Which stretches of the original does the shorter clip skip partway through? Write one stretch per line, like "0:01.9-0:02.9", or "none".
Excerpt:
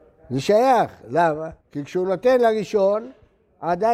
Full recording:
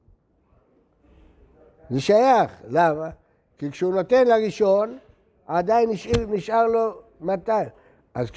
0:03.2-0:03.5